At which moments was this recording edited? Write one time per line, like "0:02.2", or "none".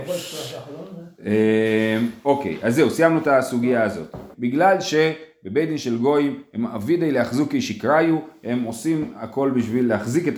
0:04.3